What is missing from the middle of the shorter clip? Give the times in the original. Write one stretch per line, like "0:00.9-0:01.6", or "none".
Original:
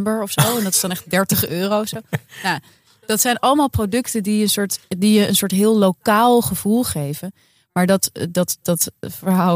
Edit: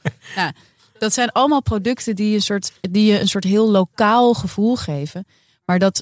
none